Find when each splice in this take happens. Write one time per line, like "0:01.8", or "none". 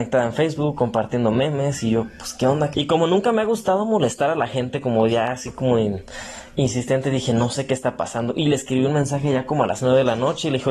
0:02.7